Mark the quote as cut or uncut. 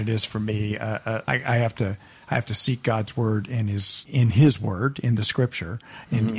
cut